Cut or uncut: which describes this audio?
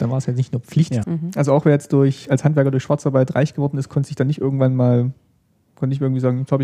cut